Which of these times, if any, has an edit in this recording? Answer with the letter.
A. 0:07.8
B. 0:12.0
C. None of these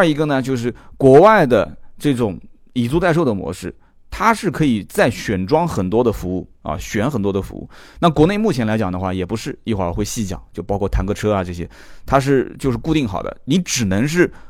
C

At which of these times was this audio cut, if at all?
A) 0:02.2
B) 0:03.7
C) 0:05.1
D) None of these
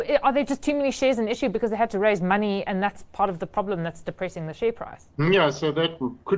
C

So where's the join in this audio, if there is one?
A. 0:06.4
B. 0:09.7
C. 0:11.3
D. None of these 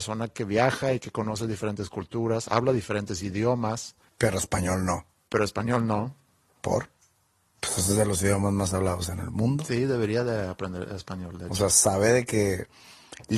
D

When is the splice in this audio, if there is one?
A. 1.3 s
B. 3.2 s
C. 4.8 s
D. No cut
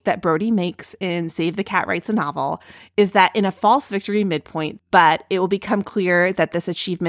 C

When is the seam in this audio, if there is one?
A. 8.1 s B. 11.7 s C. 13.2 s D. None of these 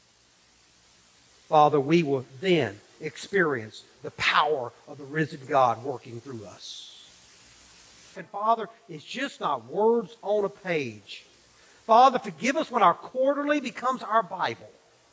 A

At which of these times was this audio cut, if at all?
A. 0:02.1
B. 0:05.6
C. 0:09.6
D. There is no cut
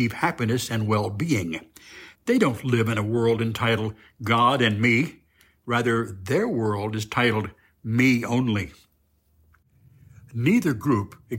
A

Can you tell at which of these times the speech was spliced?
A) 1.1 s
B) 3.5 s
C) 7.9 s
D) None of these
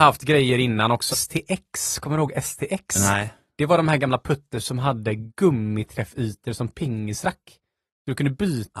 A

